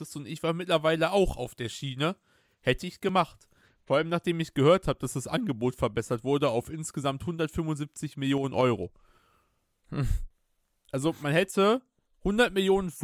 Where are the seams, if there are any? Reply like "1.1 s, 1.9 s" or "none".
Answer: none